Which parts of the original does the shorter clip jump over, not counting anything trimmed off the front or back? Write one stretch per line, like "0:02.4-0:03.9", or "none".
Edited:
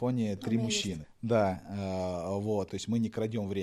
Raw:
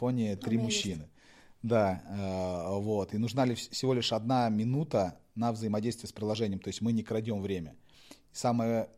0:01.0-0:01.4
0:03.1-0:06.6